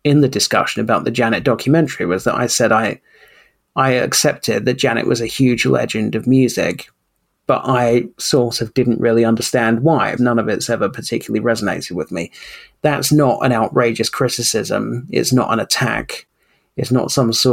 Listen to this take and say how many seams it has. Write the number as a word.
one